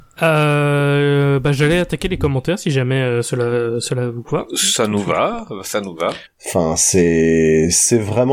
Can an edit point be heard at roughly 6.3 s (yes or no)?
yes